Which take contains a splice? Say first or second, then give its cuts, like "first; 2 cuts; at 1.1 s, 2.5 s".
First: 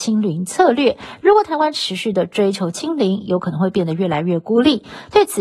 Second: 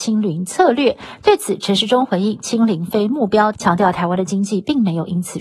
second; 2 cuts; at 1.2 s, 3.5 s